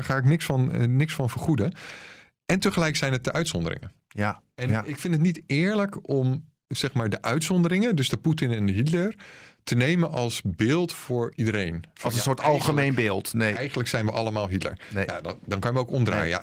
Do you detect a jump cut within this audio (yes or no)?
no